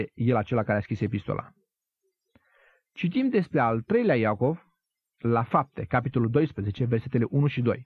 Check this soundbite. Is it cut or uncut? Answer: uncut